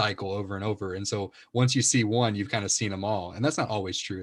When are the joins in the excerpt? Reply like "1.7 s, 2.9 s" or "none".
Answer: none